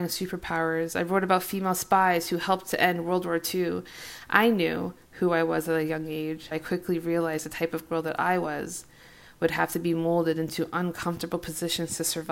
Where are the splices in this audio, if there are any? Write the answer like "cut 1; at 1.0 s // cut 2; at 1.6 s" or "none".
cut 1; at 6.5 s